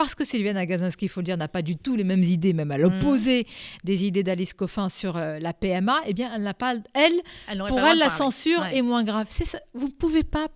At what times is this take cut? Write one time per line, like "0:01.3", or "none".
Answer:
none